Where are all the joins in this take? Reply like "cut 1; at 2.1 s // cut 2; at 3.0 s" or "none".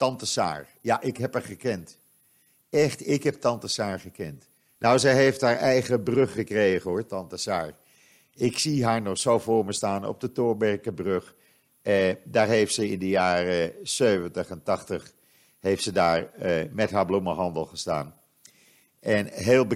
cut 1; at 4.8 s

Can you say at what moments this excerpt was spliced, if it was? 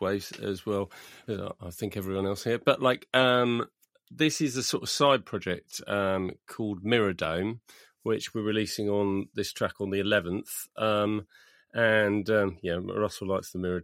none

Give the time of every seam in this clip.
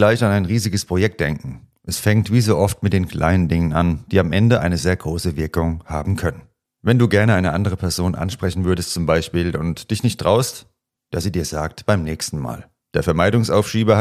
cut 1; at 11.1 s // cut 2; at 12.8 s

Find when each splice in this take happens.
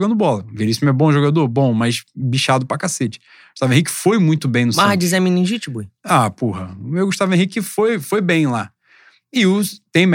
none

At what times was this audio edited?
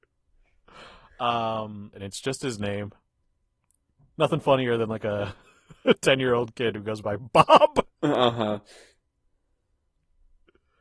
cut 1; at 1.9 s

